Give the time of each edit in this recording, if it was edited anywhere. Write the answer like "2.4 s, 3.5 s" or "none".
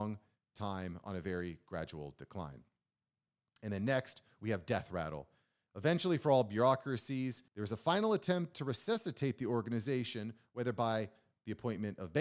7.5 s